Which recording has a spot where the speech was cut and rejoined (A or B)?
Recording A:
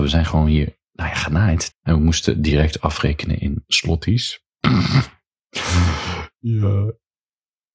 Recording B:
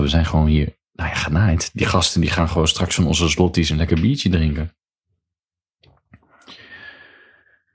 A